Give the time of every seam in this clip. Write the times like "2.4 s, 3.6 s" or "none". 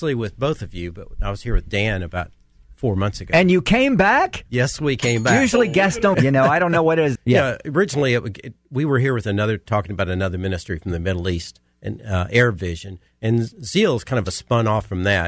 6.1 s, 7.2 s

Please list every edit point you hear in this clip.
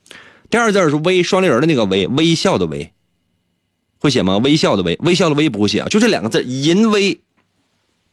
none

